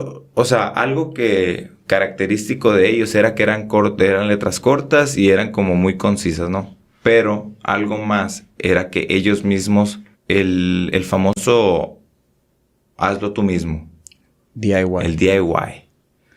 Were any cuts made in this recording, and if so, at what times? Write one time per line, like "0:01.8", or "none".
0:10.1